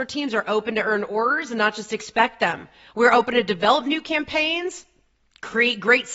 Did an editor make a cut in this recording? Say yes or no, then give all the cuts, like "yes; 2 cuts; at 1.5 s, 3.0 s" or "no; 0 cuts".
no; 0 cuts